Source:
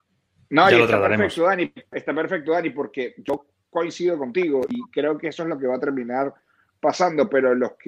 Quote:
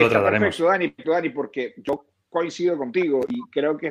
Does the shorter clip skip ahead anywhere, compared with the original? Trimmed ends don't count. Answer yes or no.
yes